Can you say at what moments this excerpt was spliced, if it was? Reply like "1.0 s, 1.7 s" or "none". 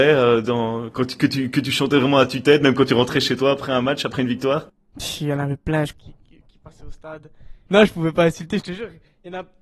5.9 s, 7.7 s